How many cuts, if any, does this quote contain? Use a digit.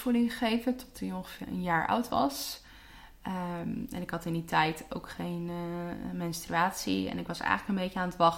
1